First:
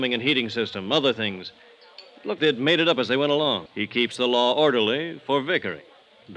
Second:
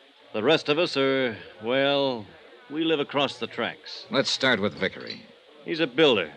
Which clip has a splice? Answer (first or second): first